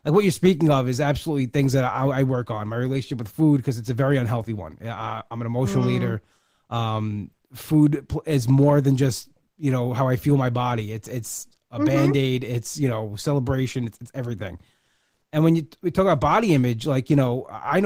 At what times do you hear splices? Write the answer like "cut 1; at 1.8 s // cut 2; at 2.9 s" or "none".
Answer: none